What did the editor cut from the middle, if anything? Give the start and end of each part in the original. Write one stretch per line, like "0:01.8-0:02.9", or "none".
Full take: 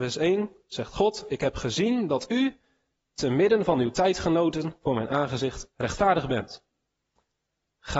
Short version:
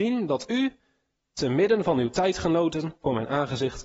none